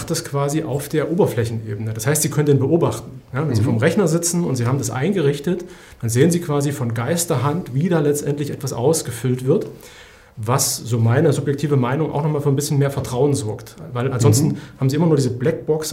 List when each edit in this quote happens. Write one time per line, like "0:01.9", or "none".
none